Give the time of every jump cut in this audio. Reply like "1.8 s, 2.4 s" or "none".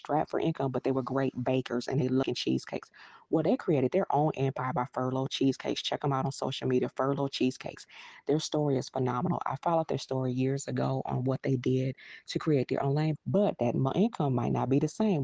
13.1 s